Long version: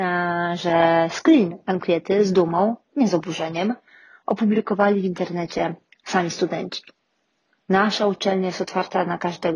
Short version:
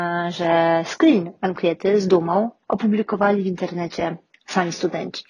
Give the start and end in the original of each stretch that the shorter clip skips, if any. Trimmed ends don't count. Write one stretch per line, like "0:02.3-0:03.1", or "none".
0:02.9-0:04.2